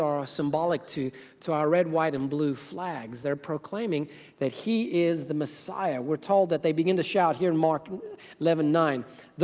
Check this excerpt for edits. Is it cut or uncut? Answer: uncut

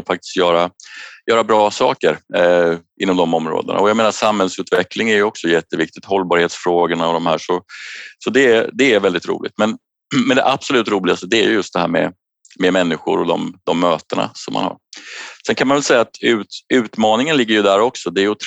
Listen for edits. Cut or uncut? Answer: uncut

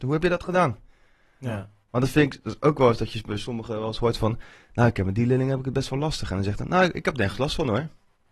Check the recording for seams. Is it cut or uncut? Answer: uncut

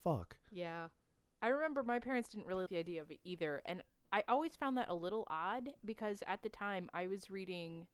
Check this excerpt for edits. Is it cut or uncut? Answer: cut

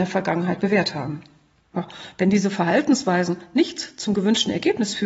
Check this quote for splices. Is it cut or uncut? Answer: uncut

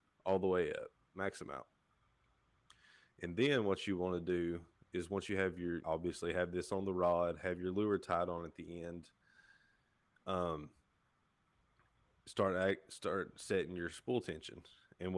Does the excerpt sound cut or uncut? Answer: cut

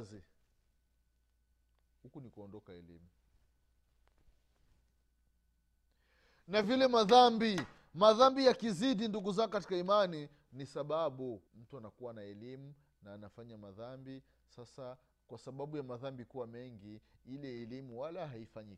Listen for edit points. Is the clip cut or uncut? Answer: cut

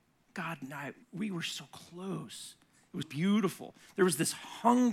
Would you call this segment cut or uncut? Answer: cut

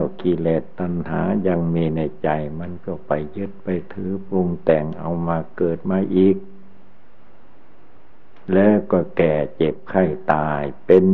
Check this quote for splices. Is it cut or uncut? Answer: cut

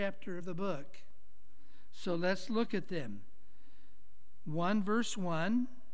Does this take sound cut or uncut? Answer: uncut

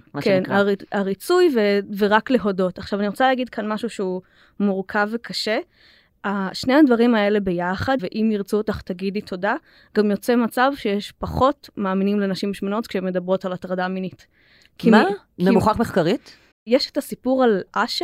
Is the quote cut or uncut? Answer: cut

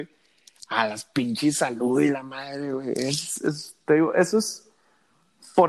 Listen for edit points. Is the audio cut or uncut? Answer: uncut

